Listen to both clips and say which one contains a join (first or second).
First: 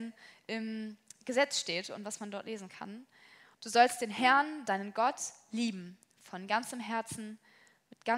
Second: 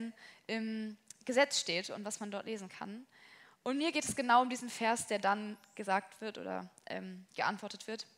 first